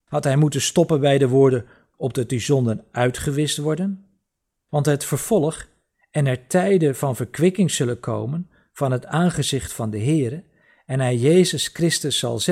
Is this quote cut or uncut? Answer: cut